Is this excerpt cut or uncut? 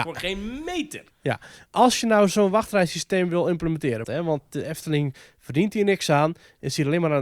cut